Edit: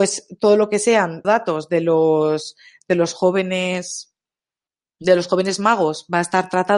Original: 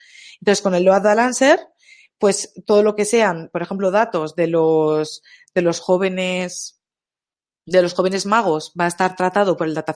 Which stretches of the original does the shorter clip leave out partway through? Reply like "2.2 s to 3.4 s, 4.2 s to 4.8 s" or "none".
3.5 s to 3.9 s